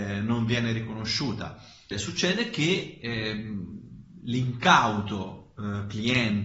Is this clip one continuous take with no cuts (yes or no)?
no